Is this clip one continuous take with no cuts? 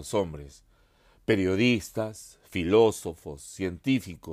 yes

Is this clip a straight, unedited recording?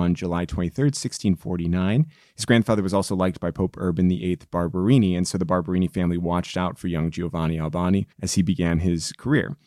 no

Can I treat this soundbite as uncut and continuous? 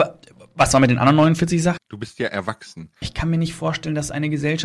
no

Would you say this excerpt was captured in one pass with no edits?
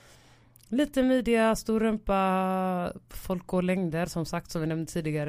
yes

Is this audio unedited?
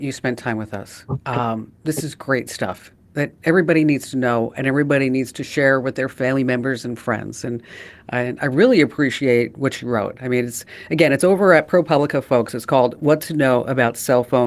yes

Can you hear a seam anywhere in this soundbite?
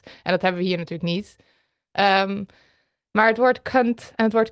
no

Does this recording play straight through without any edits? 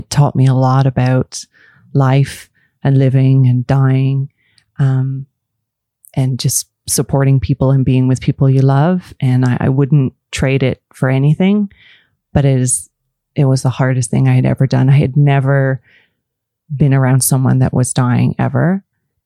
yes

